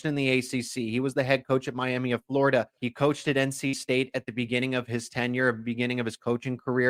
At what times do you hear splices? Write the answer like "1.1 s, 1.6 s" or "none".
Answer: 2.8 s